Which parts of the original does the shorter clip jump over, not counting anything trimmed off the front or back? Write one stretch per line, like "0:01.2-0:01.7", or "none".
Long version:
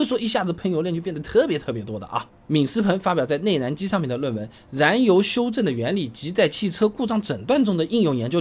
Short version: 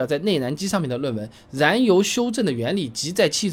none